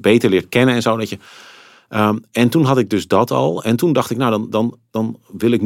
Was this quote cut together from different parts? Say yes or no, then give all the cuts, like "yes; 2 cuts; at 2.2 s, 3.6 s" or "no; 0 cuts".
no; 0 cuts